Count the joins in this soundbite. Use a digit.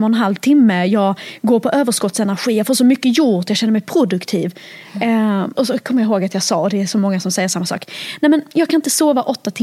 1